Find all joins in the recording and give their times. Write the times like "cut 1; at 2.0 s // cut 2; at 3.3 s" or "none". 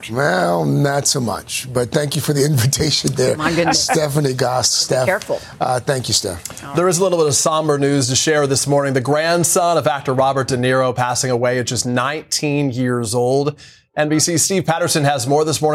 none